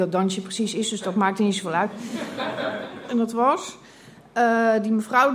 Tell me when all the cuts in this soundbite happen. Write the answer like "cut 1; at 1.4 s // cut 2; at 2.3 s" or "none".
cut 1; at 3.1 s